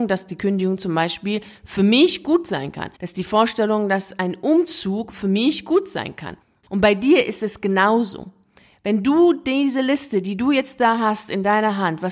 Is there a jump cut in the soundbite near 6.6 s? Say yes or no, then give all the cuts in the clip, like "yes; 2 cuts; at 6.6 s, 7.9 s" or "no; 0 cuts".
no; 1 cut; at 2.9 s